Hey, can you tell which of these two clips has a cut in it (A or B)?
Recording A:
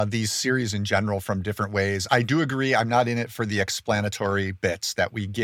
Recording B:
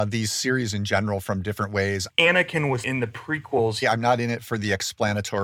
B